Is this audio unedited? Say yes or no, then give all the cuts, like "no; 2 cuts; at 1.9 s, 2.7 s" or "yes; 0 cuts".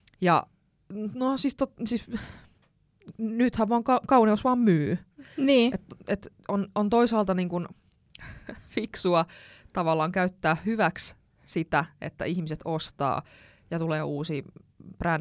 yes; 0 cuts